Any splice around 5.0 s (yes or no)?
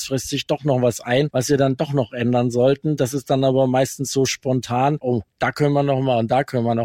yes